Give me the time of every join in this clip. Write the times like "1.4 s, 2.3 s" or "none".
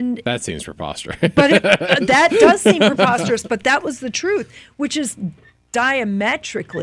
none